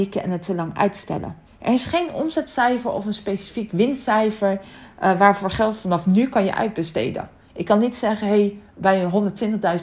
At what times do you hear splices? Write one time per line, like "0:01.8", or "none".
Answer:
0:01.5